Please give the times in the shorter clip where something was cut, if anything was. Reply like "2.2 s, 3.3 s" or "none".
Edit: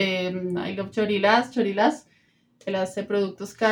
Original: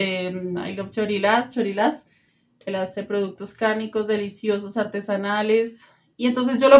none